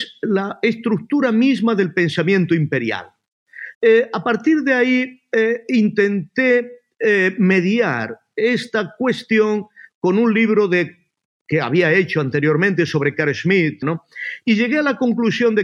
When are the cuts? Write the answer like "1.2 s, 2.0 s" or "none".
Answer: 3.7 s, 13.8 s